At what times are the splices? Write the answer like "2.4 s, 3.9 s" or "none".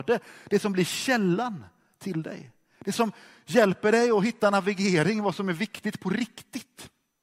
none